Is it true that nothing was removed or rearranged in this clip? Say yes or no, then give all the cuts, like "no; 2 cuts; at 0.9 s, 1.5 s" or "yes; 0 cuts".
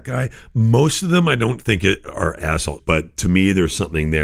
no; 1 cut; at 2.8 s